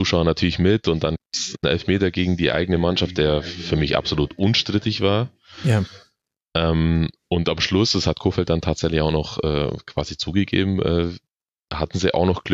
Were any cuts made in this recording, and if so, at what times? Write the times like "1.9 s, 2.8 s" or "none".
none